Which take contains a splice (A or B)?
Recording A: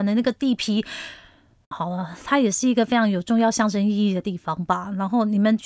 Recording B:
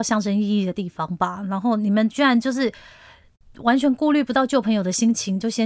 A